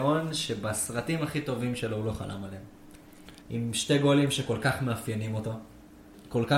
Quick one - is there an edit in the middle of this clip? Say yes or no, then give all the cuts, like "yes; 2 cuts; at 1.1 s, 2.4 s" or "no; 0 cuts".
yes; 1 cut; at 3.4 s